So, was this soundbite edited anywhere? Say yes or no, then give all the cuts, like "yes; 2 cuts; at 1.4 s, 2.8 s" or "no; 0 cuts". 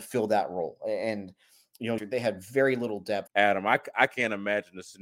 yes; 2 cuts; at 2.0 s, 3.3 s